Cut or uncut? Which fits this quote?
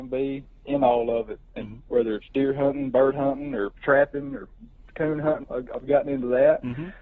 cut